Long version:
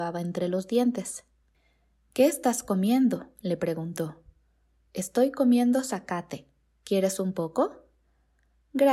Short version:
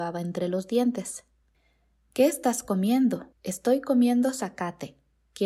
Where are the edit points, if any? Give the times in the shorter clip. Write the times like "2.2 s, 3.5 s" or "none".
3.3 s